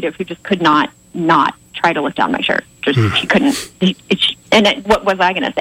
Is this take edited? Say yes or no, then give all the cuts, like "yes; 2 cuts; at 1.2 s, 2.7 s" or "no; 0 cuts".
no; 0 cuts